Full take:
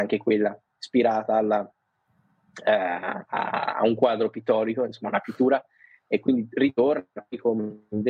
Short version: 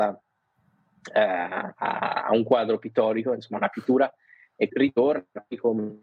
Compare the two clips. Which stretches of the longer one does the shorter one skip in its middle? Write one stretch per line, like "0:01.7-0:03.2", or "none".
0:06.2-0:06.5

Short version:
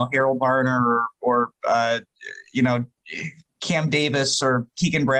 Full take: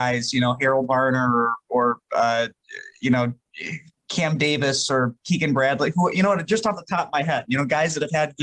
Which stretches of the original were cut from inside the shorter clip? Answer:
none

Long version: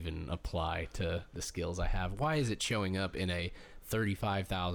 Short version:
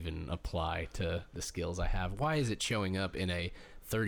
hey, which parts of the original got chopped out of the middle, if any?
none

